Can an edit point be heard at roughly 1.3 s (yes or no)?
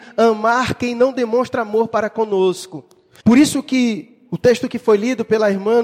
no